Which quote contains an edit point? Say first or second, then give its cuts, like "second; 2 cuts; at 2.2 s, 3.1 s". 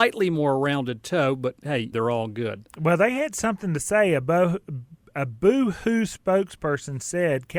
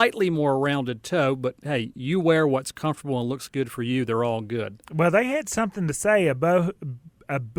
first; 1 cut; at 1.9 s